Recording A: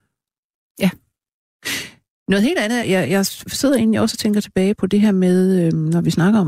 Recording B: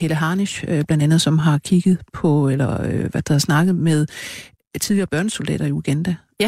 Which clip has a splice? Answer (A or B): A